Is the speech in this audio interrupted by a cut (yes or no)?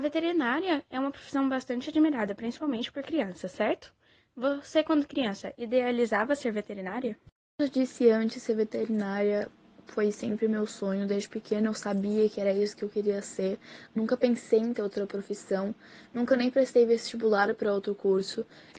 no